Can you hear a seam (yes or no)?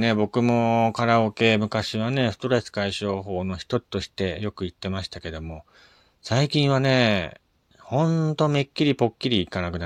no